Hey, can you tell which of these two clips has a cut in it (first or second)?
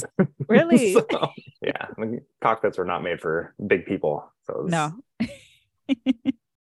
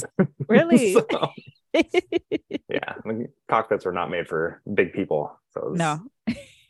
first